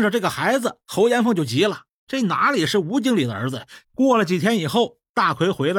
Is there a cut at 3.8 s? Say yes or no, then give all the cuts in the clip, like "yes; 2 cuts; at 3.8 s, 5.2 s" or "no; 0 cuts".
yes; 1 cut; at 3.8 s